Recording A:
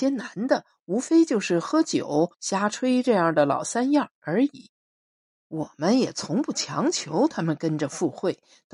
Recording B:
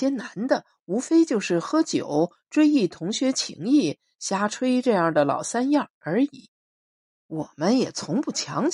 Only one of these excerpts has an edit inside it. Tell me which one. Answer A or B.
A